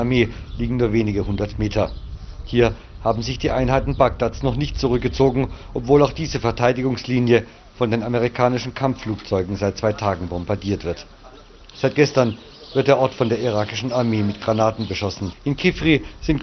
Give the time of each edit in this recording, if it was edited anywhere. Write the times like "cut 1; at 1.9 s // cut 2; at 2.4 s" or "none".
cut 1; at 11.7 s // cut 2; at 15.3 s